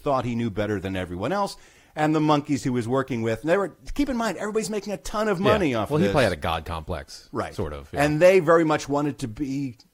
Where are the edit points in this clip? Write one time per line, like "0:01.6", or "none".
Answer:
none